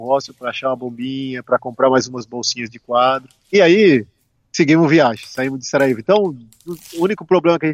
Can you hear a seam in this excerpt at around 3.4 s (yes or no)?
yes